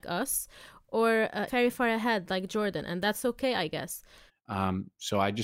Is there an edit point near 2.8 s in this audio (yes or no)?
no